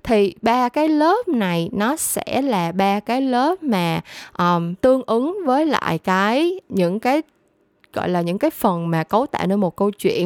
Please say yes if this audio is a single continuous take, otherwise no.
no